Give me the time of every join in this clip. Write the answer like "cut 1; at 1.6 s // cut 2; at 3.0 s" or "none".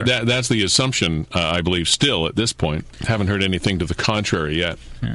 cut 1; at 2.9 s